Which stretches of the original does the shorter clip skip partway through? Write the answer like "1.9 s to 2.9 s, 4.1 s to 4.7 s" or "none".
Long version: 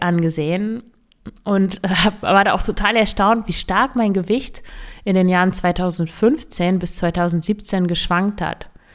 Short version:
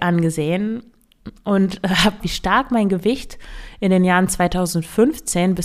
2.2 s to 3.4 s

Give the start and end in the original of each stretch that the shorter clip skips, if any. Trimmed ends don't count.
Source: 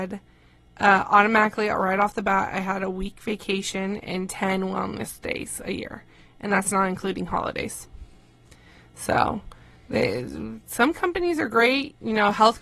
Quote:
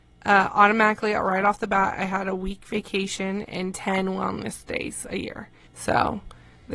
6.2 s to 8.9 s

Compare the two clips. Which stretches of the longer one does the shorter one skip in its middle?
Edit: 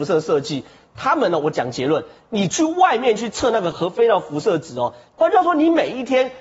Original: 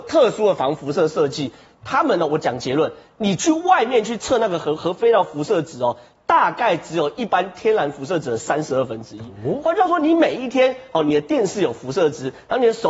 4.6 s to 4.8 s, 6.2 s to 9.6 s

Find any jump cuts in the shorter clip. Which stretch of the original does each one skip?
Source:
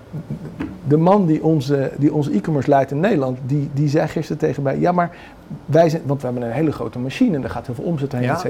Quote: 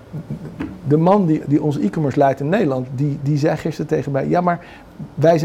1.4 s to 1.9 s

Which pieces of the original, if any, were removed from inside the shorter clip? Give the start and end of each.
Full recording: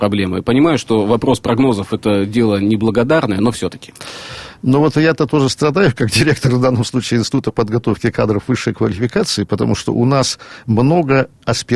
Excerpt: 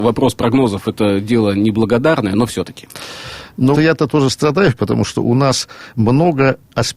4.8 s to 4.9 s, 5.9 s to 9.5 s

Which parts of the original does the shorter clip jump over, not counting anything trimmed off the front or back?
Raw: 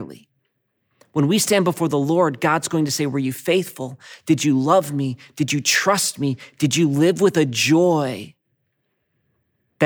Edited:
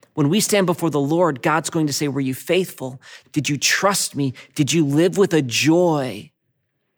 4.2 s to 5.3 s

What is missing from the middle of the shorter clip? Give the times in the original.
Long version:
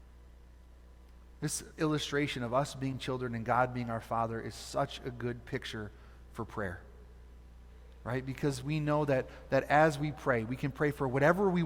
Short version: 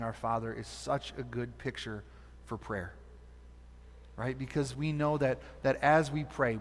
none

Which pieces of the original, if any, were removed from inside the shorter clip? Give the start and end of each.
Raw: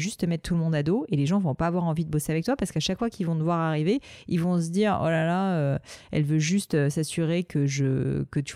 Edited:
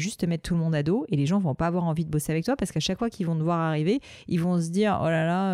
none

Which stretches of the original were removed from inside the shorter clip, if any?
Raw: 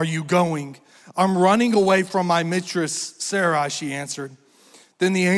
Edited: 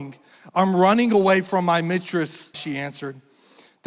3.2 s to 3.7 s

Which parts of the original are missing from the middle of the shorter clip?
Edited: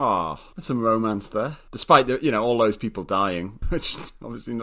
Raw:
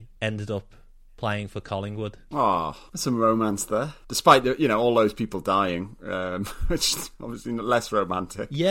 6.0 s to 6.6 s

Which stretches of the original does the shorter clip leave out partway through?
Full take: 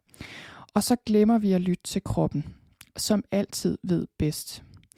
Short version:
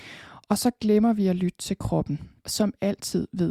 2.6 s to 2.9 s

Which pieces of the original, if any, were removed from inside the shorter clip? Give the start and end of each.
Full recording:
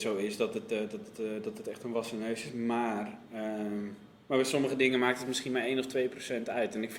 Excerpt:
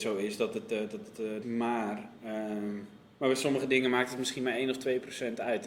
1.4 s to 2.5 s

